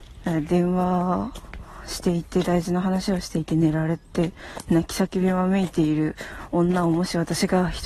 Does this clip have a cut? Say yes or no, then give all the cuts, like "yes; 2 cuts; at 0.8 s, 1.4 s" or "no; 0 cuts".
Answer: no; 0 cuts